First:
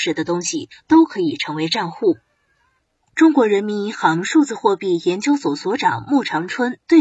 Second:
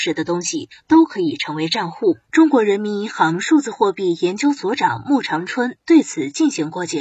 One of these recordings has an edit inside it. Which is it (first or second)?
second